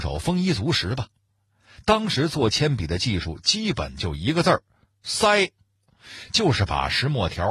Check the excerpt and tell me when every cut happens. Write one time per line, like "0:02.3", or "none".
none